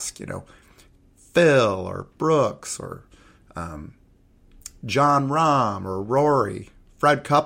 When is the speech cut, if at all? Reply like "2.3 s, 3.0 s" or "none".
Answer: none